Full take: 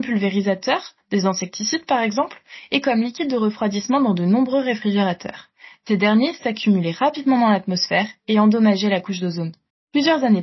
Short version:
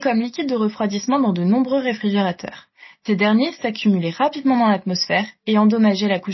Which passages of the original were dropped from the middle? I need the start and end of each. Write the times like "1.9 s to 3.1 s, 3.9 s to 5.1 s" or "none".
none